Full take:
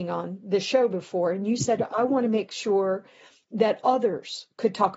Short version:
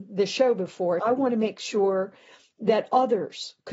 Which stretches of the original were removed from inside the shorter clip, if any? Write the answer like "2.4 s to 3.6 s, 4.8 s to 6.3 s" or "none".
1.3 s to 1.9 s